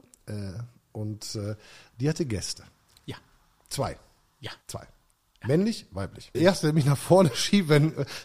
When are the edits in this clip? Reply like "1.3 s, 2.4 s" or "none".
4.6 s, 6.3 s